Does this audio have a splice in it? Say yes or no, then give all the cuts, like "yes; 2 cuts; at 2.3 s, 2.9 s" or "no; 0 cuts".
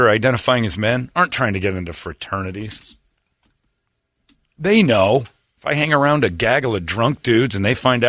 no; 0 cuts